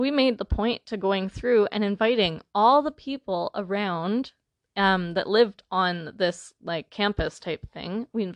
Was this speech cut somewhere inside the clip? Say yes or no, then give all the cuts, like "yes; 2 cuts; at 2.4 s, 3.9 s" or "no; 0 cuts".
no; 0 cuts